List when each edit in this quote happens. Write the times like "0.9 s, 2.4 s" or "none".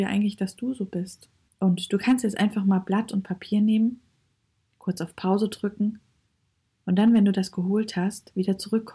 1.5 s